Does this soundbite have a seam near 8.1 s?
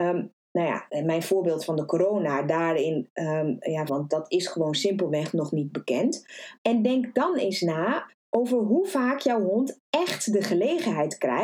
yes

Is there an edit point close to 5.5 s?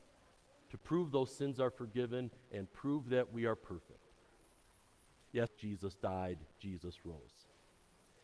yes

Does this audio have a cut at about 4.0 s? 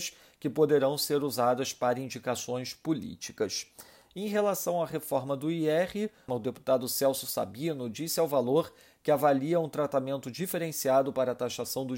no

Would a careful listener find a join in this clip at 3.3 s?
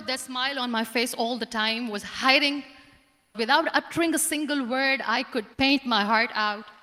yes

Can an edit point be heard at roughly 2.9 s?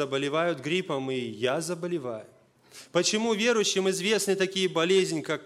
no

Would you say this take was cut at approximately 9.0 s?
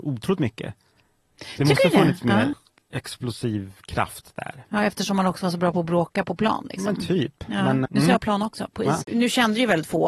yes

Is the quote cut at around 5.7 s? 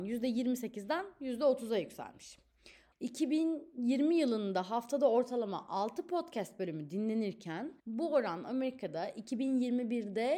no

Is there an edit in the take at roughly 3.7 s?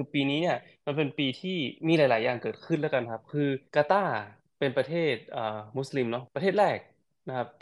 yes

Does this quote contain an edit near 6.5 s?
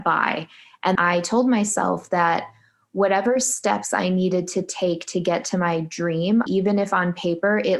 yes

